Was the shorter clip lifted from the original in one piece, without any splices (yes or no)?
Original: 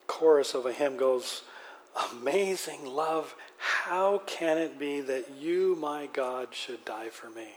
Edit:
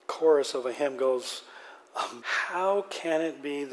no